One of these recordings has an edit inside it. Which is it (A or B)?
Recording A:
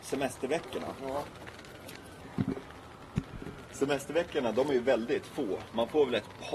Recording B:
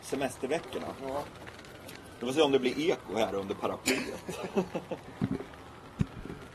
A